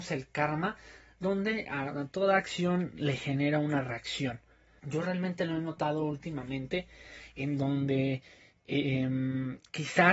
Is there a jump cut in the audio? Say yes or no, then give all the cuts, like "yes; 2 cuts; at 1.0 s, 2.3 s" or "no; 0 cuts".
yes; 1 cut; at 4.8 s